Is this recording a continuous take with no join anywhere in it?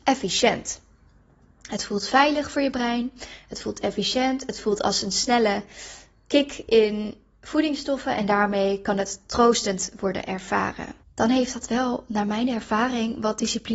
no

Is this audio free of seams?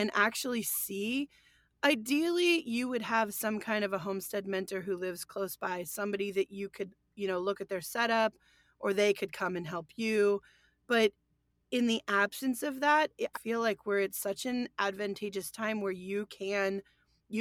no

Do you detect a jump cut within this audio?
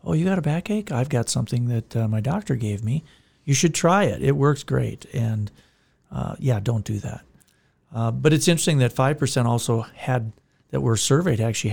no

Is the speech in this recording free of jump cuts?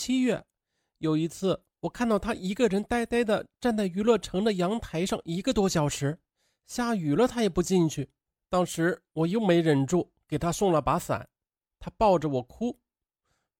yes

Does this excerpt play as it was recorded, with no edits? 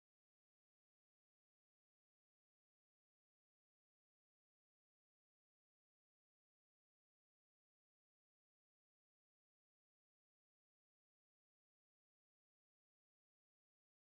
yes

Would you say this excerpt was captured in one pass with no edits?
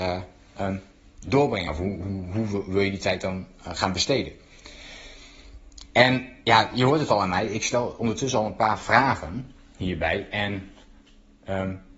yes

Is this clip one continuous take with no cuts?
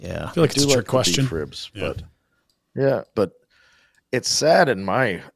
no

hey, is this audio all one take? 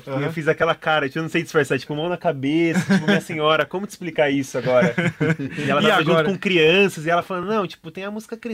yes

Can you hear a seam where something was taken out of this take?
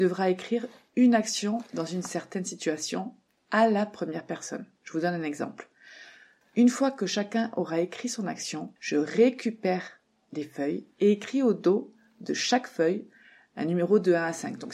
yes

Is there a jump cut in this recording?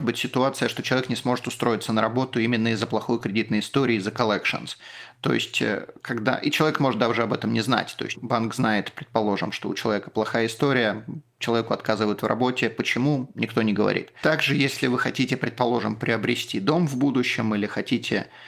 yes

